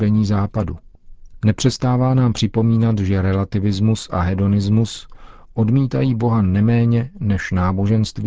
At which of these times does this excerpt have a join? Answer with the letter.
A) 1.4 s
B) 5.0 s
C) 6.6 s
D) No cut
A